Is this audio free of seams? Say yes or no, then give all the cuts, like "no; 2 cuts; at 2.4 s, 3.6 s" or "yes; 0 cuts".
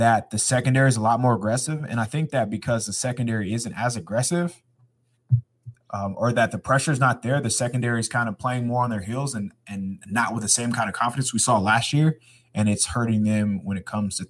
yes; 0 cuts